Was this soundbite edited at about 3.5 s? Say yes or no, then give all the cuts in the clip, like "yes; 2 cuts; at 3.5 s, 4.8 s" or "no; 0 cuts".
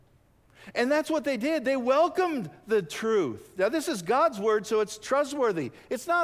no; 0 cuts